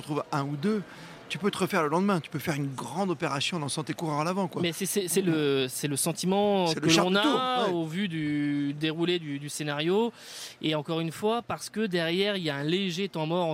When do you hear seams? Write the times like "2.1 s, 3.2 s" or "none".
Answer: none